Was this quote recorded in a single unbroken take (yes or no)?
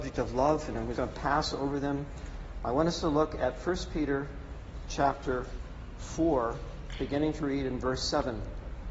no